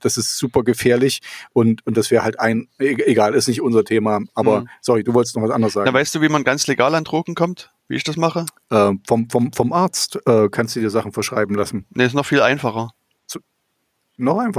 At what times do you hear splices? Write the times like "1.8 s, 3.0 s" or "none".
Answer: 7.8 s